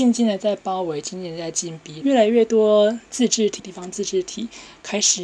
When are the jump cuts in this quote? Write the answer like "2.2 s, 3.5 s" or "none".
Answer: 2.0 s, 3.6 s